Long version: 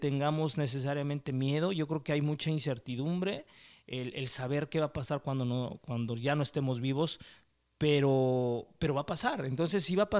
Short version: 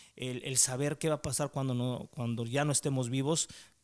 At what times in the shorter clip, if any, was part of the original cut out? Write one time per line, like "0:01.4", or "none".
none